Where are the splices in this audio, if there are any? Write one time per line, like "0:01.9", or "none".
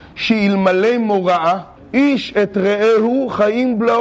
0:01.8